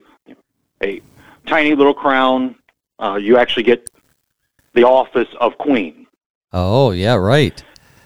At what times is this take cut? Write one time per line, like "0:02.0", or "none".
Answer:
none